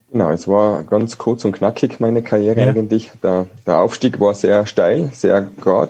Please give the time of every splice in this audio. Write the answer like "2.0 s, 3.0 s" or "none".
none